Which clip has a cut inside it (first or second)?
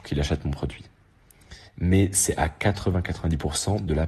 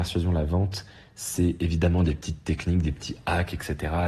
first